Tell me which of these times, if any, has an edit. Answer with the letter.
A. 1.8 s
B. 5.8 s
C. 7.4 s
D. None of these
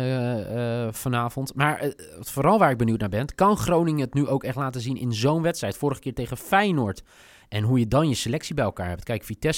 C